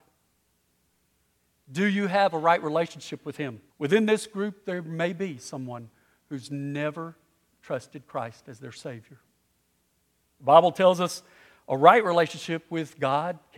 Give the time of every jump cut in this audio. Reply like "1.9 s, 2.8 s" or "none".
3.7 s